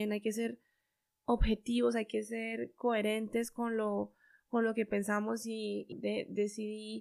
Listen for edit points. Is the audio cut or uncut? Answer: cut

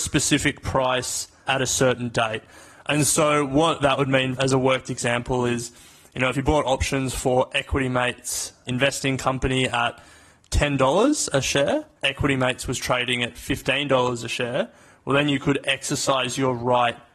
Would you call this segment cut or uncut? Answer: cut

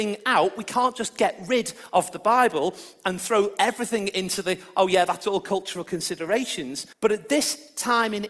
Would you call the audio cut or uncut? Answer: cut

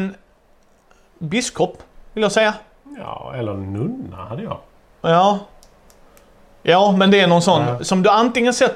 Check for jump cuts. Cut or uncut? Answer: uncut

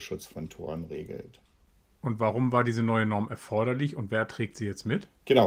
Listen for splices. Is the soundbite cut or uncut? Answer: uncut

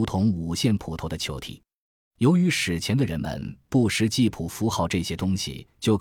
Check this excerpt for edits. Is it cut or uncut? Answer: uncut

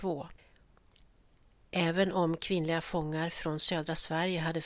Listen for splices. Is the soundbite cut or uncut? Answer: uncut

